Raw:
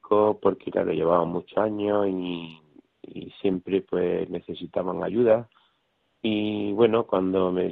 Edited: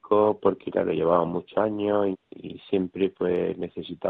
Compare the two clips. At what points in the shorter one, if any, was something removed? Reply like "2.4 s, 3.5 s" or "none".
2.1 s